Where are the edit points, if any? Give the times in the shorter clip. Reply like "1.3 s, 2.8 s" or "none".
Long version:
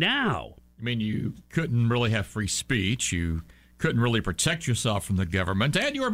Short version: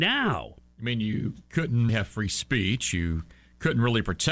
1.9 s